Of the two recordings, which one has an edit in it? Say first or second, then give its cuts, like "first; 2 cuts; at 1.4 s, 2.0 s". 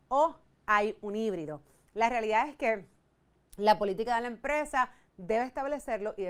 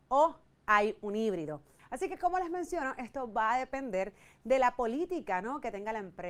second; 1 cut; at 1.8 s